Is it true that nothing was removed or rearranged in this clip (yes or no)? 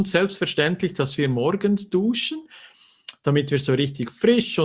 yes